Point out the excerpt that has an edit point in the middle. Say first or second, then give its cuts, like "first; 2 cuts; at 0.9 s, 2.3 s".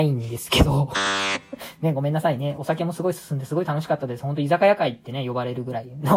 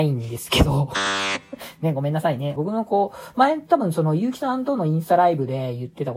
second; 1 cut; at 2.6 s